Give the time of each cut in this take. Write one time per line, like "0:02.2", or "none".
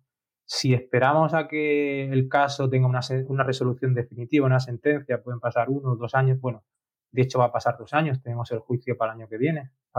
none

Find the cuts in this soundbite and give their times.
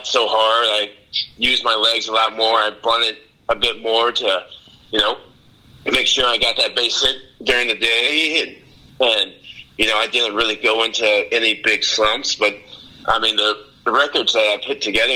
none

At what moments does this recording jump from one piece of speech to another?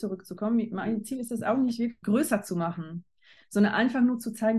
0:02.0

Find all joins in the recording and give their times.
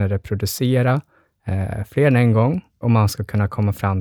0:02.8

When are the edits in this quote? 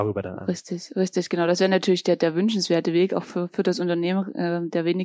none

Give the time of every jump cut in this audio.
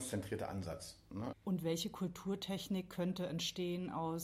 0:01.3

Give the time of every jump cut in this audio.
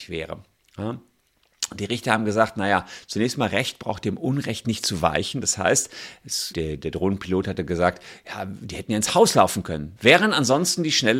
0:06.5
0:10.0

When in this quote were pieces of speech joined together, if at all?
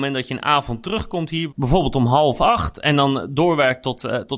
0:01.5

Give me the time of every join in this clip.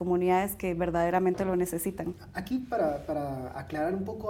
none

